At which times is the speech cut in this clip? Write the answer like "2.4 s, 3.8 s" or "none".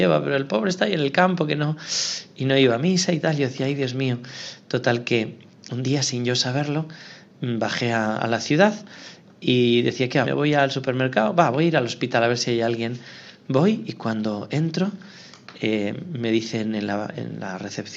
10.2 s